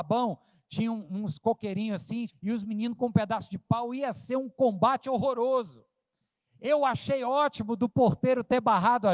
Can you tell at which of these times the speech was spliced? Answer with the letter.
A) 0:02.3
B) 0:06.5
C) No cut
A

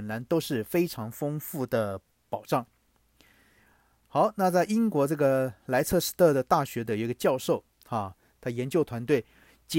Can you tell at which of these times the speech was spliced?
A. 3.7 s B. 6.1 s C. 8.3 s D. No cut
D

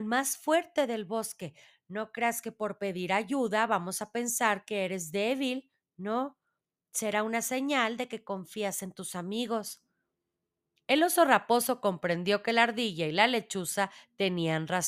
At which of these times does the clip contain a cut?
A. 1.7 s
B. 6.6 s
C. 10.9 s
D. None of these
D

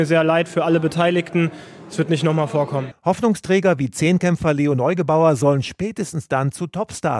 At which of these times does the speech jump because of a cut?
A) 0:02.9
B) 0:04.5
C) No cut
A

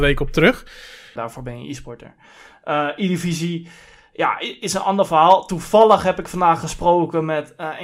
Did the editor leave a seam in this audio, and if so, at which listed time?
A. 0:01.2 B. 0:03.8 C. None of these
A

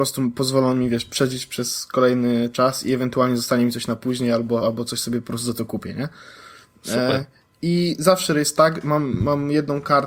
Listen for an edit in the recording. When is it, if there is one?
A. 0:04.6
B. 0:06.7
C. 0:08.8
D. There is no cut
A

